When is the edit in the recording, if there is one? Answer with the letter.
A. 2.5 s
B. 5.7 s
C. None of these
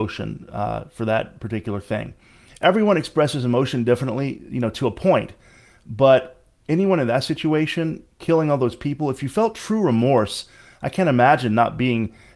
A